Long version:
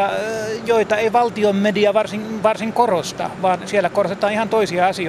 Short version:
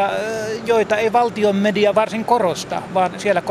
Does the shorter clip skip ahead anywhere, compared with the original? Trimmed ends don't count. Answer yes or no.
yes